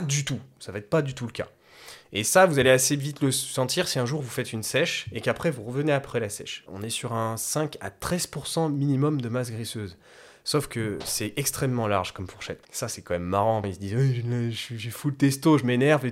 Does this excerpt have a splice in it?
yes; 3 cuts; at 6.7 s, 12.6 s, 13.6 s

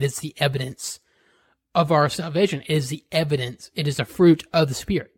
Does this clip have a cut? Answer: no; 0 cuts

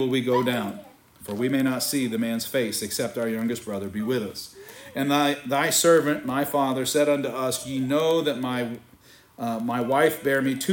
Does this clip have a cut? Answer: no; 0 cuts

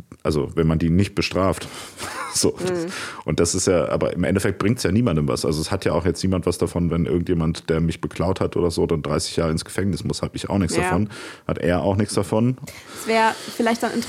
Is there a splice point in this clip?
yes; 1 cut; at 12.7 s

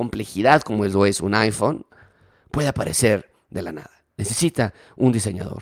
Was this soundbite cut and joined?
no; 0 cuts

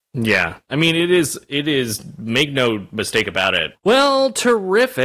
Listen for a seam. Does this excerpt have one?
yes; 1 cut; at 3.7 s

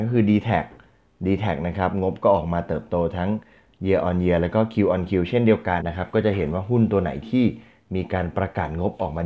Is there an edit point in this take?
yes; 1 cut; at 5.8 s

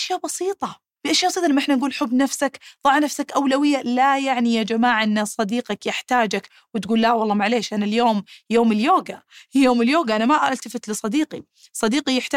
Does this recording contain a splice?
yes; 1 cut; at 1.0 s

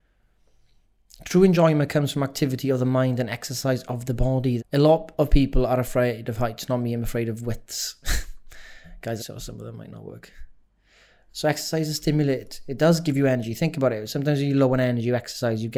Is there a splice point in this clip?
yes; 3 cuts; at 4.6 s, 9.2 s, 11.3 s

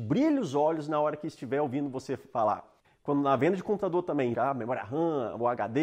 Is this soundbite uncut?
no; 2 cuts; at 2.8 s, 4.3 s

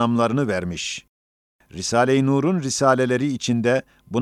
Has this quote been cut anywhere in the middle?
no; 0 cuts

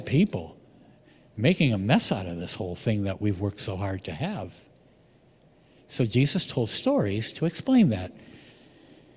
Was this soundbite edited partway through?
no; 0 cuts

